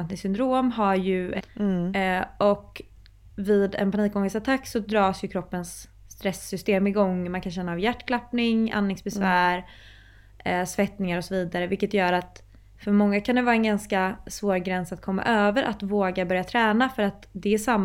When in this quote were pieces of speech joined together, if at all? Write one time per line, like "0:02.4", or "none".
0:01.4